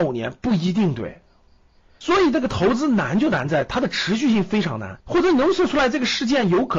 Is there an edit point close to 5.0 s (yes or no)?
yes